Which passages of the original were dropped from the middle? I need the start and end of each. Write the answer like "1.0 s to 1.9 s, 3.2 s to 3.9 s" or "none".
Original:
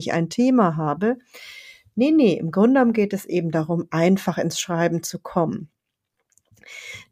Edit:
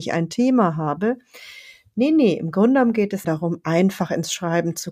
3.2 s to 3.5 s